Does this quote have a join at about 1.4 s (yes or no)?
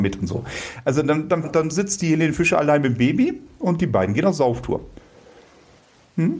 yes